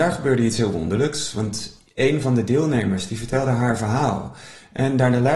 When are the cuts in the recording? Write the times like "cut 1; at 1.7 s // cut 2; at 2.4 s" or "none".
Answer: none

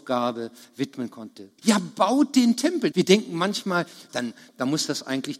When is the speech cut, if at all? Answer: cut 1; at 1.6 s // cut 2; at 2.9 s // cut 3; at 4.1 s

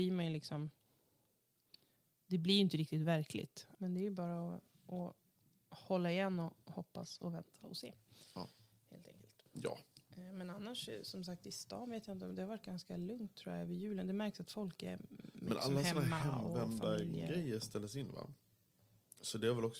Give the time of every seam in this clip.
cut 1; at 3.7 s

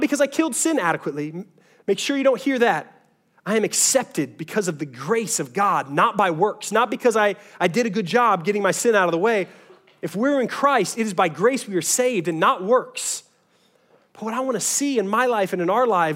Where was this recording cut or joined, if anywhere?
none

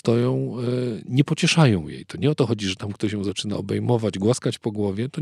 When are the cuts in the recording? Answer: none

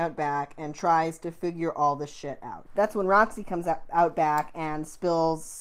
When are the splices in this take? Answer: cut 1; at 2.7 s

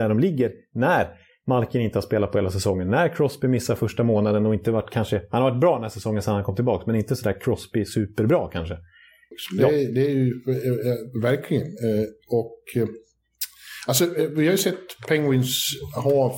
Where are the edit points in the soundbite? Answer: cut 1; at 9.3 s

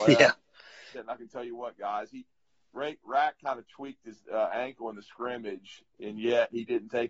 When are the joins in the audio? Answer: cut 1; at 0.9 s

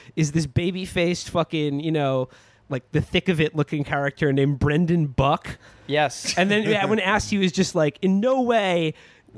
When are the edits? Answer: none

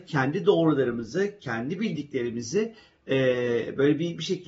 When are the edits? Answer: none

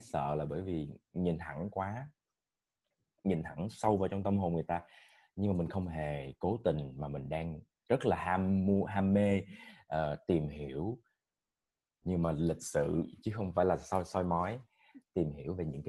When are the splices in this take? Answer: none

